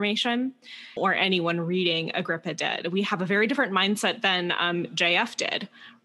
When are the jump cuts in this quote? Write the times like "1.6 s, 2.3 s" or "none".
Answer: 1.0 s